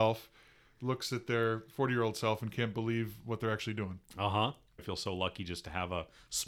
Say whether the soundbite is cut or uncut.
cut